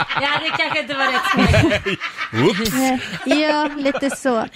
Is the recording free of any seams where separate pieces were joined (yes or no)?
no